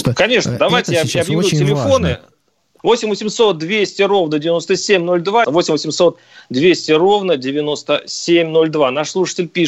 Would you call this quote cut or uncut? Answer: cut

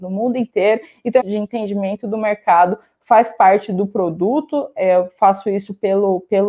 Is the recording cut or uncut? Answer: cut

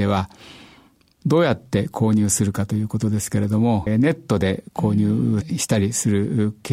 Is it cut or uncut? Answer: cut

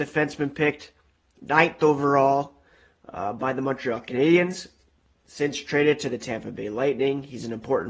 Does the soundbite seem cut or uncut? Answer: uncut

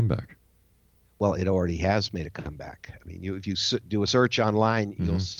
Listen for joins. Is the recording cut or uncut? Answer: uncut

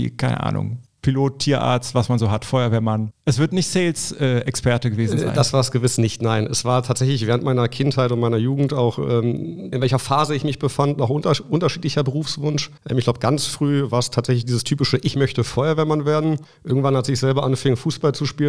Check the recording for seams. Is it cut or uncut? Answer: cut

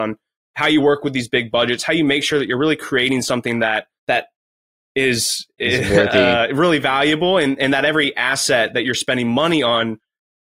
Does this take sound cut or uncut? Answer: cut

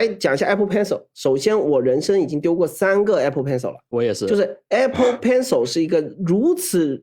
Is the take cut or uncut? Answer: uncut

